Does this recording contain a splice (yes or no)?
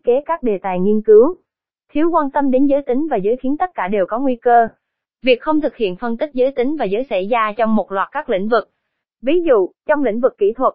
no